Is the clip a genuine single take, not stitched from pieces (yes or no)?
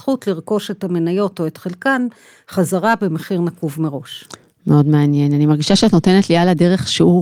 yes